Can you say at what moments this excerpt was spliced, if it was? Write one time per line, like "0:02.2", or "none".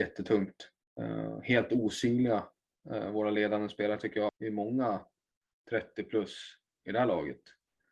0:04.3